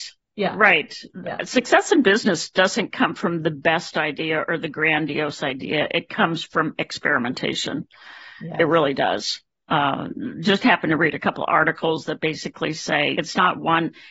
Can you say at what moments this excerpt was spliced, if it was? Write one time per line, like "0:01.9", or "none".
0:13.2